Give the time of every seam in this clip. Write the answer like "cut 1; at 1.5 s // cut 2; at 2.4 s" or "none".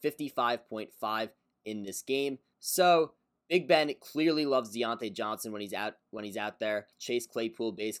cut 1; at 2.5 s // cut 2; at 6.9 s